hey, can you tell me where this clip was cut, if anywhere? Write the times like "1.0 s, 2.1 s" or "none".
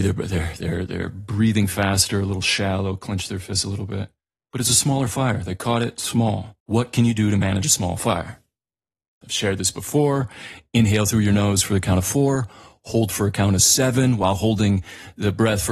6.6 s, 9.2 s